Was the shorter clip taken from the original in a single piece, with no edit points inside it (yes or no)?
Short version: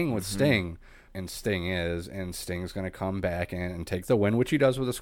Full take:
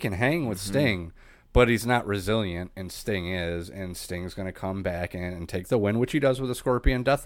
no